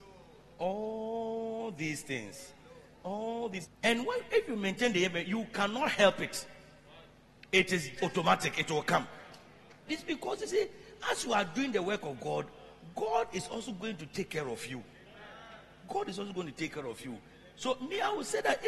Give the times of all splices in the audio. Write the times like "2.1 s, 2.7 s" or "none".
3.6 s, 8.0 s, 9.9 s